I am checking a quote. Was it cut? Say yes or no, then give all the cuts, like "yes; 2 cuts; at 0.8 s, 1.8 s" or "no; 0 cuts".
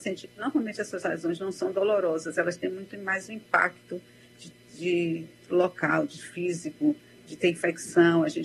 no; 0 cuts